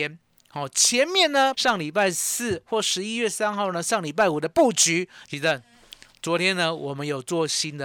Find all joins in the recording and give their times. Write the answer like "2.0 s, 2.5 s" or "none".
1.5 s, 5.2 s